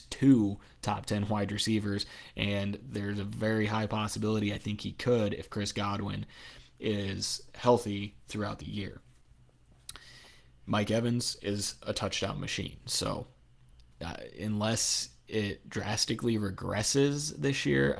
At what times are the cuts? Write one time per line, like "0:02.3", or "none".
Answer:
none